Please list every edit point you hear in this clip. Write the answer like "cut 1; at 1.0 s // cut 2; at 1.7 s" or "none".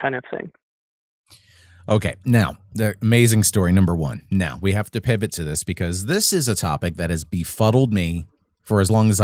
none